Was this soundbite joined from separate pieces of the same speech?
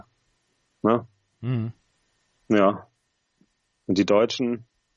no; 0 cuts

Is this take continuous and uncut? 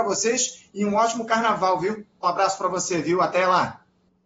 no; 1 cut; at 2.2 s

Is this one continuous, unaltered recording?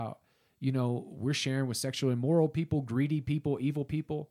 yes; 0 cuts

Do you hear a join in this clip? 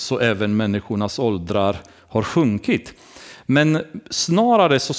no; 0 cuts

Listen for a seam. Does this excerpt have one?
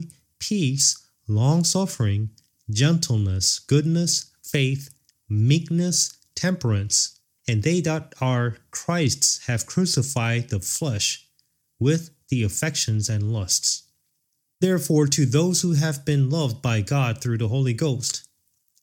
yes; 2 cuts; at 7.4 s, 14.5 s

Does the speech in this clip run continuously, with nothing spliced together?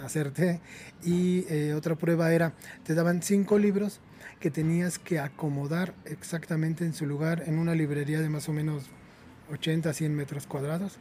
yes; 0 cuts

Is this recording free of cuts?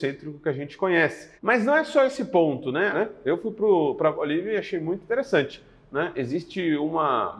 no; 2 cuts; at 1.4 s, 2.9 s

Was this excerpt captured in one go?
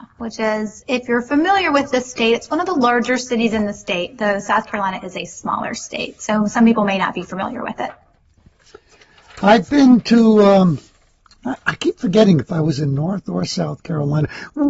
yes; 0 cuts

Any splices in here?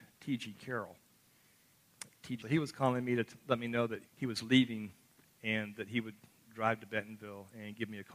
yes; 2 cuts; at 2.4 s, 4.1 s

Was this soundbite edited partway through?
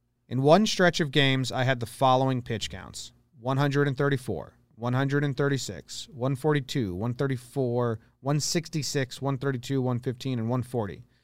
no; 0 cuts

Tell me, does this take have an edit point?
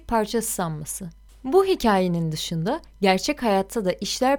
no; 0 cuts

